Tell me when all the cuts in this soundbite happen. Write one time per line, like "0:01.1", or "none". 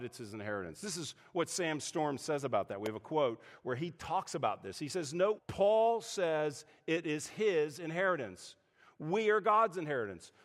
0:05.4